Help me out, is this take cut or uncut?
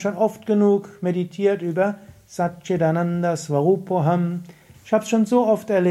cut